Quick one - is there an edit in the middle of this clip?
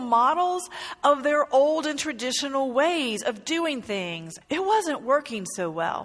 yes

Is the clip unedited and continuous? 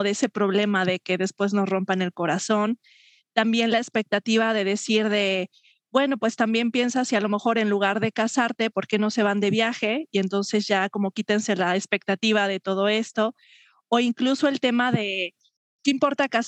no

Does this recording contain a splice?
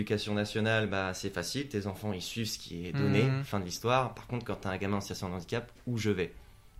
no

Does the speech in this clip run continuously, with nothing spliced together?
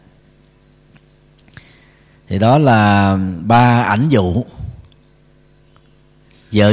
yes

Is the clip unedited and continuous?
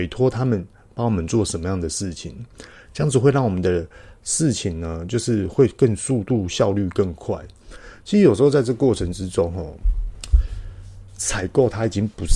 yes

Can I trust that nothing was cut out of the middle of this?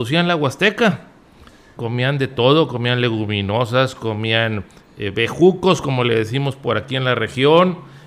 no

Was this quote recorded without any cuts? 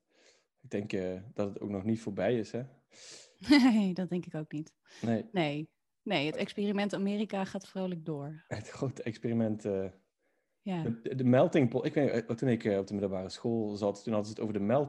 yes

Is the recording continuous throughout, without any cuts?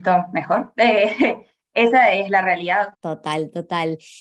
no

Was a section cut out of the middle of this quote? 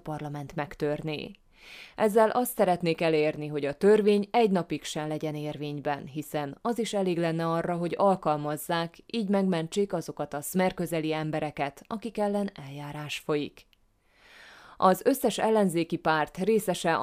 yes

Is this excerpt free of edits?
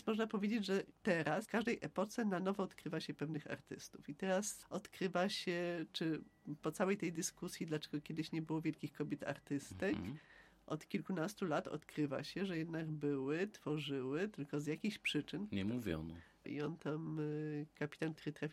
no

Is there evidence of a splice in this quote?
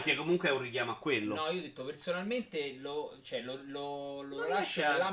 no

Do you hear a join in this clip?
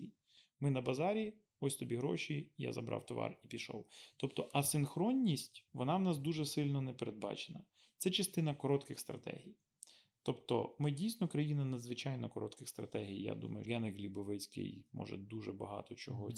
yes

